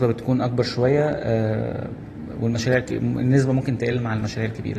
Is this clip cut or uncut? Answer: uncut